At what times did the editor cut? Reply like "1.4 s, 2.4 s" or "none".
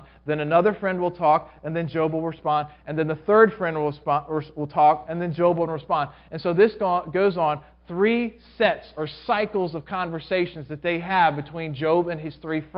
none